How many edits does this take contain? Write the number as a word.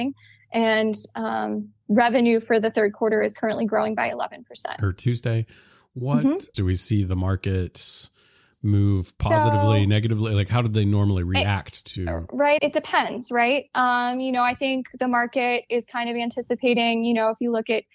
three